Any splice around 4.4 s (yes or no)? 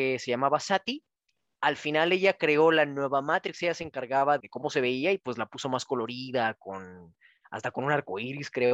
yes